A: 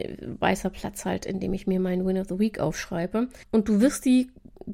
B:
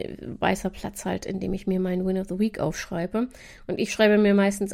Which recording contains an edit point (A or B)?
A